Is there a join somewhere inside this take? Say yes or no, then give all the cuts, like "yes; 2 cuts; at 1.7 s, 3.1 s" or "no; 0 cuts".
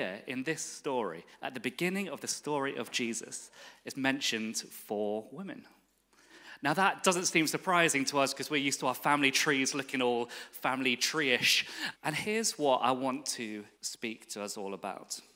yes; 2 cuts; at 11.9 s, 13.7 s